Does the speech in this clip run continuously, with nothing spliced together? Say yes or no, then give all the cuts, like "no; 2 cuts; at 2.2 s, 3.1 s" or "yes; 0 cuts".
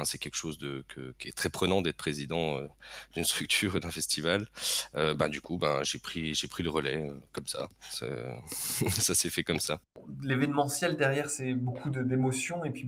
yes; 0 cuts